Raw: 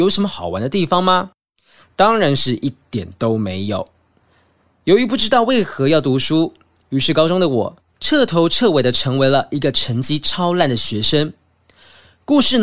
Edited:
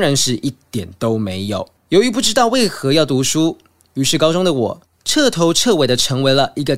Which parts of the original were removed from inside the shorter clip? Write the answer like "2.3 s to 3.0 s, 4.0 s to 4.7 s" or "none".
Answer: 4.0 s to 4.7 s